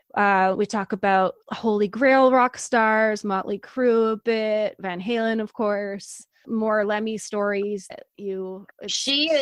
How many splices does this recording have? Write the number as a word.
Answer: one